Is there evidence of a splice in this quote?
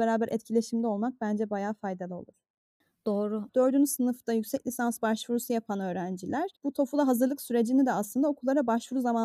yes; 2 cuts; at 3.5 s, 6.6 s

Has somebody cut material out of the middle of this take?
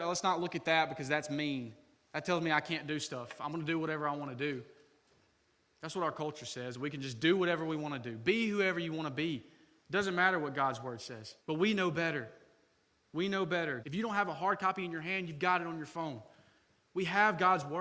yes; 2 cuts; at 11.4 s, 13.8 s

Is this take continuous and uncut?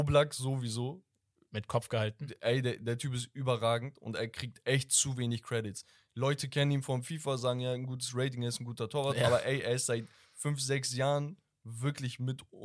yes; 0 cuts

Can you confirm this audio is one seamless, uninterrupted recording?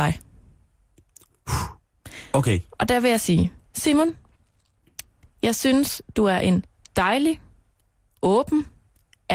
yes; 0 cuts

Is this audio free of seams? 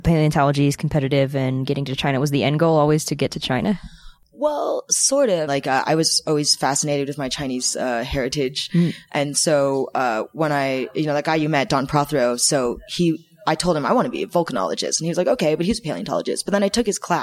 no; 1 cut; at 5.5 s

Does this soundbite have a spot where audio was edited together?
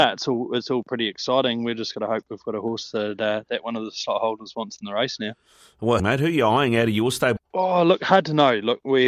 yes; 2 cuts; at 6.0 s, 7.4 s

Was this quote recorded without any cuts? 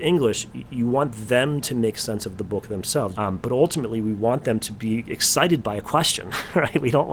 no; 1 cut; at 3.1 s

